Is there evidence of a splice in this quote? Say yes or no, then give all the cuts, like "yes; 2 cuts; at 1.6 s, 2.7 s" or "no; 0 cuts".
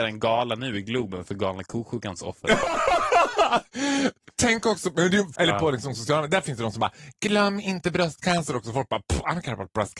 yes; 1 cut; at 5.3 s